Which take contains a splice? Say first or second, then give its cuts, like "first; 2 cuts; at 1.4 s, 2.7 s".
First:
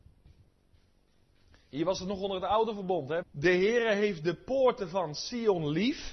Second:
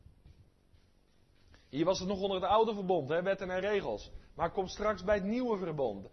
first; 1 cut; at 3.2 s